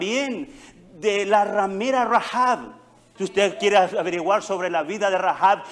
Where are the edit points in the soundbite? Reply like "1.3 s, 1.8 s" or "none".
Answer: 3.2 s